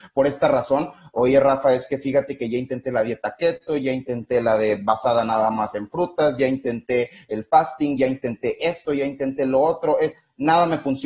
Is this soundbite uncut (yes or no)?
yes